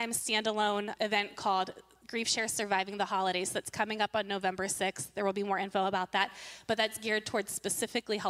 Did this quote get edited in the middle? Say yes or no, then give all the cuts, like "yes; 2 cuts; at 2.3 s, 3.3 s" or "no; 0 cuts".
yes; 1 cut; at 1.0 s